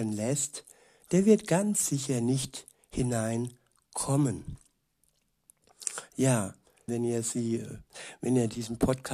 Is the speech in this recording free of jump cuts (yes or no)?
no